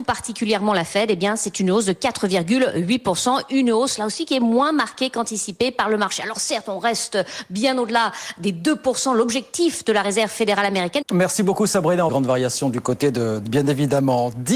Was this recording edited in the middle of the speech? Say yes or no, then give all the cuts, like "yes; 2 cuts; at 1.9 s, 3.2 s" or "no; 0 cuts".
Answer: yes; 3 cuts; at 11.0 s, 12.1 s, 13.4 s